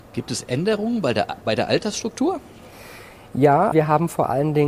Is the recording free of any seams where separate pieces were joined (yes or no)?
no